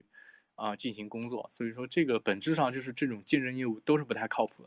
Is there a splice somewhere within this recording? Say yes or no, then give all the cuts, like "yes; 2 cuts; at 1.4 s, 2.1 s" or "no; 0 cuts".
yes; 1 cut; at 2.2 s